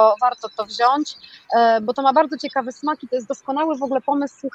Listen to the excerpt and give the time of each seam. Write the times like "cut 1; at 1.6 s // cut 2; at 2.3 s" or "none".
none